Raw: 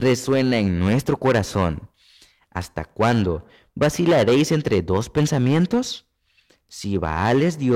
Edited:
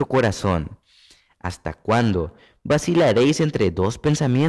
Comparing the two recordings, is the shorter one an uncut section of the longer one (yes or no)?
yes